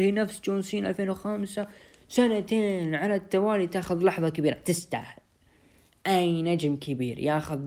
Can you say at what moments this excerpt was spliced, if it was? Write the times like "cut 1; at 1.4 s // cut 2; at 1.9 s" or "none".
none